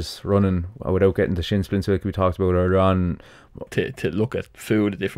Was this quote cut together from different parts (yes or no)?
yes